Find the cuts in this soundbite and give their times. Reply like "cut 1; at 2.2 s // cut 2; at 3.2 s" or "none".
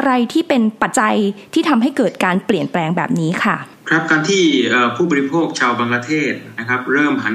cut 1; at 0.9 s